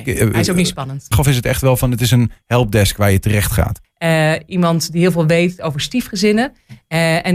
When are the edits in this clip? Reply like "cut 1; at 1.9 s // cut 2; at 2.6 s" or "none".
cut 1; at 1.1 s // cut 2; at 3.8 s